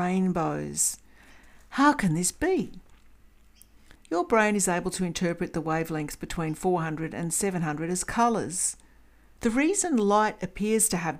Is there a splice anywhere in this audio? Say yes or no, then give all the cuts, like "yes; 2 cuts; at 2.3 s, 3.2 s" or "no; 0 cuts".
yes; 2 cuts; at 4.0 s, 9.4 s